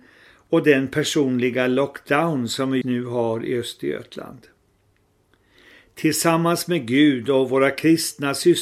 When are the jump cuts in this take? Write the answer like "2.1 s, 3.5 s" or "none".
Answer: 2.8 s